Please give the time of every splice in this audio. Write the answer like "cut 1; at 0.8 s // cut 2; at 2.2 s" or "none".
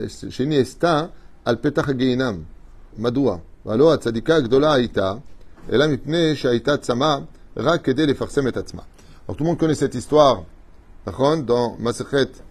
cut 1; at 2.9 s